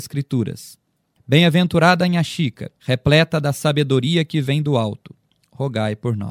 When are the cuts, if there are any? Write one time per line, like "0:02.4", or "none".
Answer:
0:01.2
0:02.8